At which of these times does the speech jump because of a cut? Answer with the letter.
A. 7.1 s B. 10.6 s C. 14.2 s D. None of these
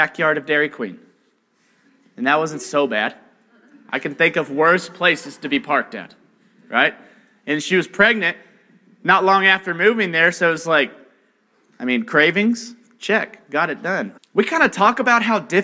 C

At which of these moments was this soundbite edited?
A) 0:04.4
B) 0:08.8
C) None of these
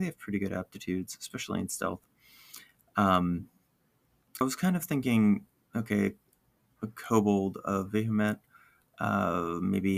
A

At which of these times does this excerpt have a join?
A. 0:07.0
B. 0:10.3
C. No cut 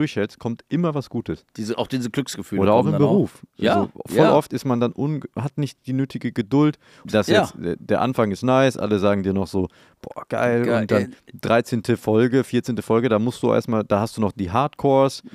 A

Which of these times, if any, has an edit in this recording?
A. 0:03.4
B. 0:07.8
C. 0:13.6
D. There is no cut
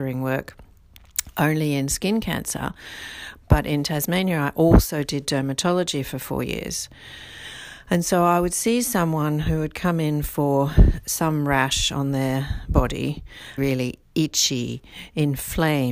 C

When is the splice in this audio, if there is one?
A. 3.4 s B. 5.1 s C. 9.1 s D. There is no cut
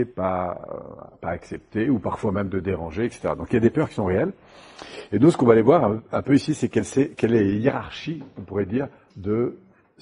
C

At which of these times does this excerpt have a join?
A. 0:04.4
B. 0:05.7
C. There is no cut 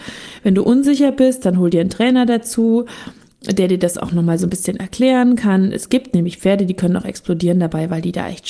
C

